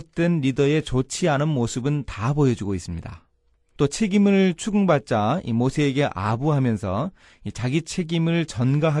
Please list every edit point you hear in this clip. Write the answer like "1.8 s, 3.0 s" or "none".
3.8 s